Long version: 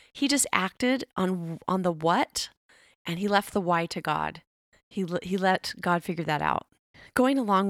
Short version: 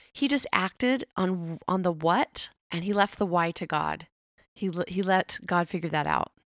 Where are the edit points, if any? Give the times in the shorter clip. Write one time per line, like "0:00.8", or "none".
0:02.6